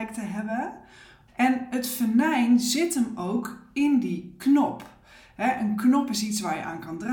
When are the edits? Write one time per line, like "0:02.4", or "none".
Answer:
0:01.3